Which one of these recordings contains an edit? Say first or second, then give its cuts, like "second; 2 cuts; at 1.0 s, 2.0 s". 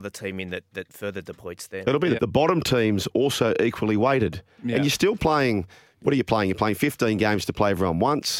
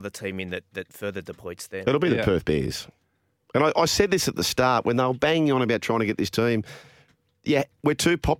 first; 1 cut; at 2.2 s